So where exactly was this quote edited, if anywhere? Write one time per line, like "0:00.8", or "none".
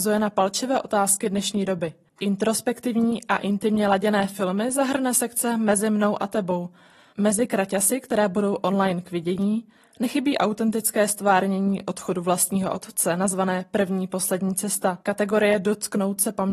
0:07.1
0:15.0